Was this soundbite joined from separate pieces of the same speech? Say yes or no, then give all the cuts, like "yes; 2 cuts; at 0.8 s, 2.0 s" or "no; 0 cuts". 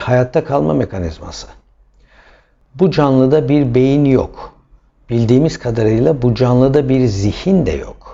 no; 0 cuts